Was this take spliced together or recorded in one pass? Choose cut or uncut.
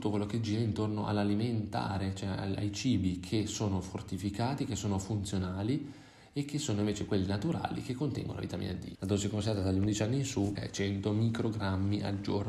cut